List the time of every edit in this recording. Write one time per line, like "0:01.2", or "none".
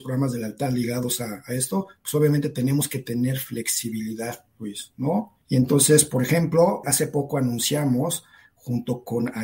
0:05.4
0:06.8